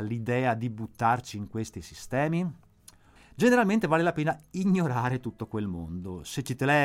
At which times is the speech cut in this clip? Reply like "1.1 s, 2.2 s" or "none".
3.2 s